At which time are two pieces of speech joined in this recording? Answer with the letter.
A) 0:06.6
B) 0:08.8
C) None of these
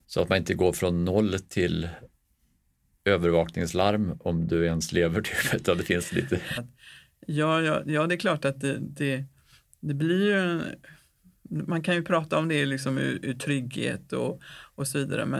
A